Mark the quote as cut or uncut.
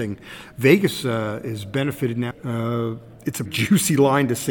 cut